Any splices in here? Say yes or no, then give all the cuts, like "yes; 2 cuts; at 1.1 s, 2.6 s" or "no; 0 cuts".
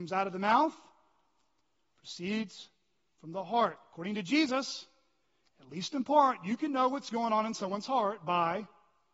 no; 0 cuts